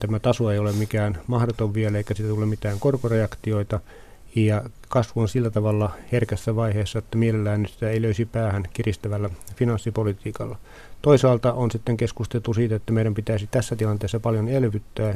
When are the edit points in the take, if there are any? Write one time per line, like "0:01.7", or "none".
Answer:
none